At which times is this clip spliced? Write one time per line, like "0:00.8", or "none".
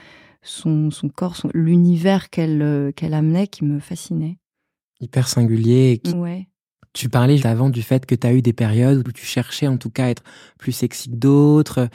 0:06.1
0:07.4

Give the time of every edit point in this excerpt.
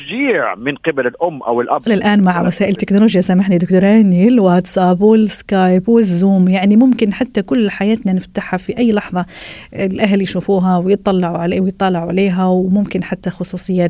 0:01.9

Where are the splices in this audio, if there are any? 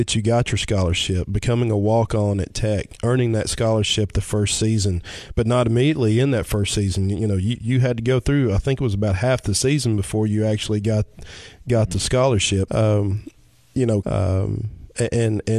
0:12.7
0:14.0

